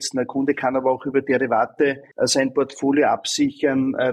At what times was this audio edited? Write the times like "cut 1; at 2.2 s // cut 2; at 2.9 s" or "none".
cut 1; at 2.1 s